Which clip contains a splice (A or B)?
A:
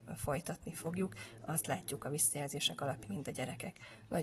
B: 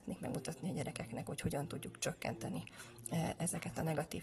A